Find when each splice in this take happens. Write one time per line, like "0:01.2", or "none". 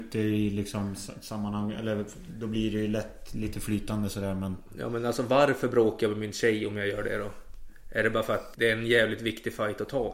0:08.5